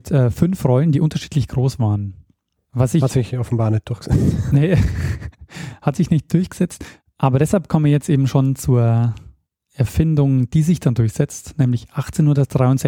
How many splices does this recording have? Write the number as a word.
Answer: zero